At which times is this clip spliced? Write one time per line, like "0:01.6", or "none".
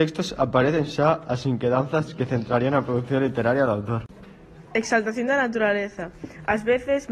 none